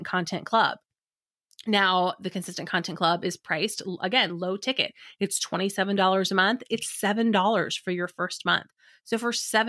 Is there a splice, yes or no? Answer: no